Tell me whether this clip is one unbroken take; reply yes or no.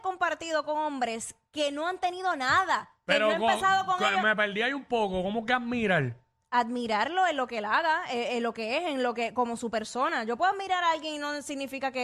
yes